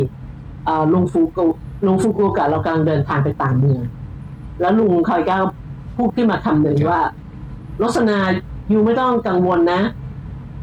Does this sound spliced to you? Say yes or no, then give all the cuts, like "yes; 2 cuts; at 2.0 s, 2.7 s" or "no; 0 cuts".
no; 0 cuts